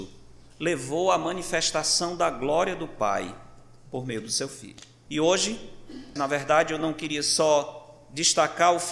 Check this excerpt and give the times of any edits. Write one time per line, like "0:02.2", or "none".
0:05.1
0:06.2